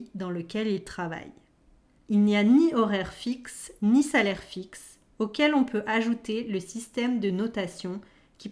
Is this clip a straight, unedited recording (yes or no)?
no